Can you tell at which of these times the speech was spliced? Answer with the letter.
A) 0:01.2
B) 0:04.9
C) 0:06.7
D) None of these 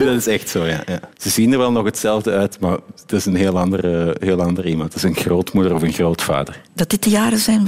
C